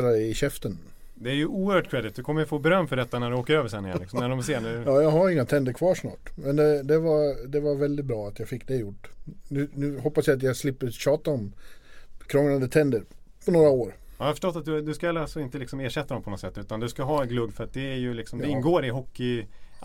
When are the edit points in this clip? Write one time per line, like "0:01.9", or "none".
none